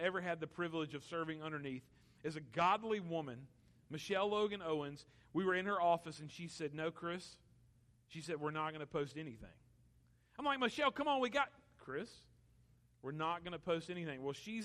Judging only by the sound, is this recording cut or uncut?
uncut